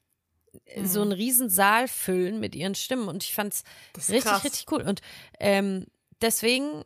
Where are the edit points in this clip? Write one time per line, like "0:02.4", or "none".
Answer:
none